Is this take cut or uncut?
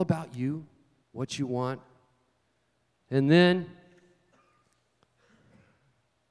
cut